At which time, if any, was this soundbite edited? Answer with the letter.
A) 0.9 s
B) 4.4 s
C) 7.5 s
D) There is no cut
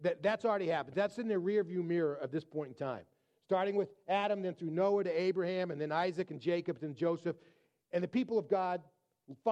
D